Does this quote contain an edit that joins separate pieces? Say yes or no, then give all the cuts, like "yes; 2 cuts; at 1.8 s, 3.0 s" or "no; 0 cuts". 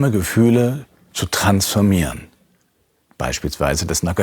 no; 0 cuts